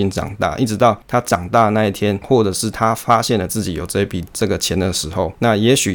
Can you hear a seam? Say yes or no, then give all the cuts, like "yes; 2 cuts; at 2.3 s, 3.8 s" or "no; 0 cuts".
yes; 1 cut; at 2.2 s